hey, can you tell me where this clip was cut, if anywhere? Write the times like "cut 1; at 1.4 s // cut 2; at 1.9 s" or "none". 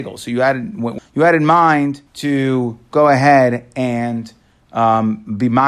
cut 1; at 1.0 s // cut 2; at 2.1 s